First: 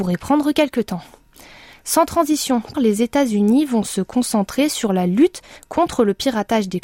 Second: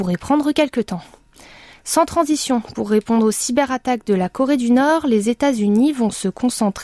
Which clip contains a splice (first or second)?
first